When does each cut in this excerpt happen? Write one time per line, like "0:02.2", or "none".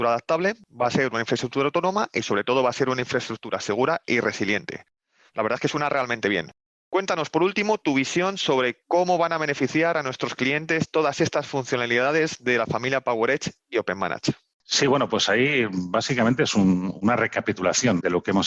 none